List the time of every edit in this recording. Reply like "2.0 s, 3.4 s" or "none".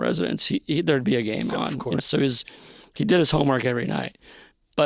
2.0 s